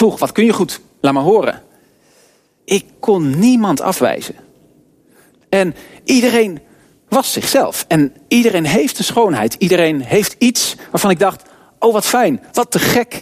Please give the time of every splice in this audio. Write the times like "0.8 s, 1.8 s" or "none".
2.6 s, 5.3 s